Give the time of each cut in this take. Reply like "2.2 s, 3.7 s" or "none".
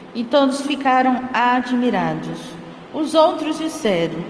2.9 s